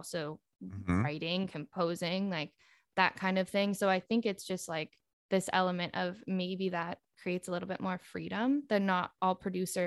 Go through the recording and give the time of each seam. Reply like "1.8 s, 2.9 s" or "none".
none